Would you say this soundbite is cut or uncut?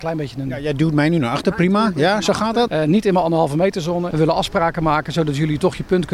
cut